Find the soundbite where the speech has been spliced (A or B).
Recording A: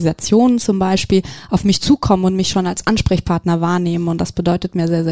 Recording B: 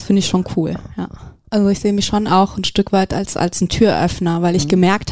B